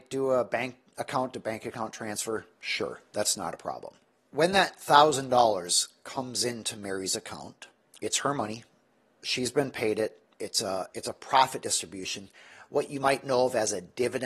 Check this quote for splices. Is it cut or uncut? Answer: uncut